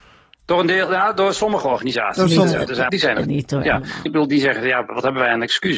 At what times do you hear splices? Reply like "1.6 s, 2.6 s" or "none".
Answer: 2.9 s, 4.1 s